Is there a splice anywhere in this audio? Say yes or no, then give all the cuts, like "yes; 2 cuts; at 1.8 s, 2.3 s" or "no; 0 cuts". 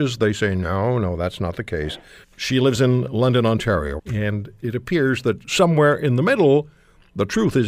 yes; 2 cuts; at 2.2 s, 4.0 s